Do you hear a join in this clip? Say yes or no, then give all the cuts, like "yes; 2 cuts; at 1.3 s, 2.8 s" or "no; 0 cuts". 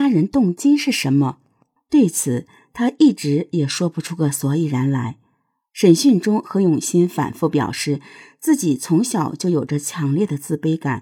no; 0 cuts